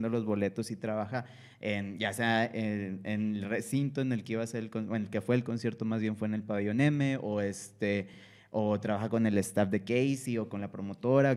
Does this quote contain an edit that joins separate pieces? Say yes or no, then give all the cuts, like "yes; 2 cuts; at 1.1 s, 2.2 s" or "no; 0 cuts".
no; 0 cuts